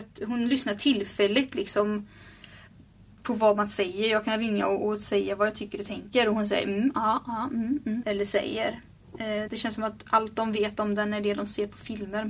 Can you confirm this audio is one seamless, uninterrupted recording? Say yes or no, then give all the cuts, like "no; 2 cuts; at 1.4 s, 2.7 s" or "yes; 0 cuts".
no; 2 cuts; at 8.0 s, 9.5 s